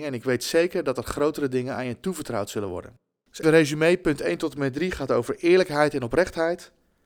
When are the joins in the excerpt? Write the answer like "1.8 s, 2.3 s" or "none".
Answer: 3.4 s